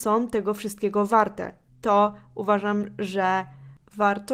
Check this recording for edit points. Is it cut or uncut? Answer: cut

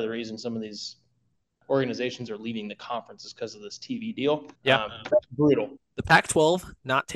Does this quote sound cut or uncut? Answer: cut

